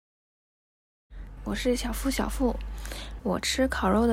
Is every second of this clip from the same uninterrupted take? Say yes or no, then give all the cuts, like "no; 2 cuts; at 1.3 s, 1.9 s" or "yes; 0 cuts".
no; 2 cuts; at 1.4 s, 3.2 s